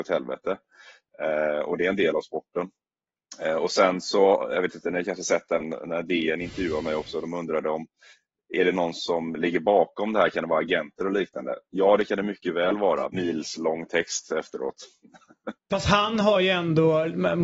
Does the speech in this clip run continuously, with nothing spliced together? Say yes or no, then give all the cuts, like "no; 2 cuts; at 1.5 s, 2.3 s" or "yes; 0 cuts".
no; 2 cuts; at 13.1 s, 15.6 s